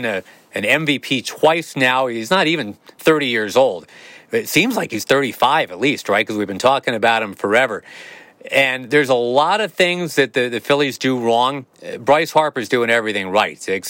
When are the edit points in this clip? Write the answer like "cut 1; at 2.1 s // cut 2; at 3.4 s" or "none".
cut 1; at 11.7 s